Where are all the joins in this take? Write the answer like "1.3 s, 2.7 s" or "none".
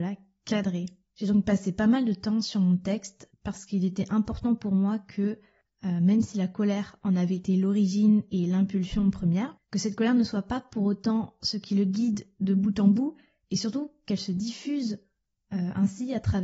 none